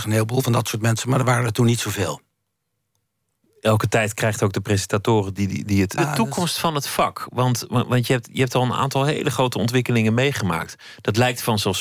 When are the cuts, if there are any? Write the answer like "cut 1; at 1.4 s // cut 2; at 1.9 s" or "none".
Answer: cut 1; at 6.0 s